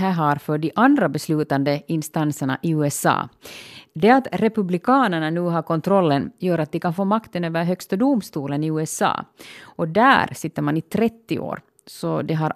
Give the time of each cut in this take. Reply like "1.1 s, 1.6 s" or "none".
none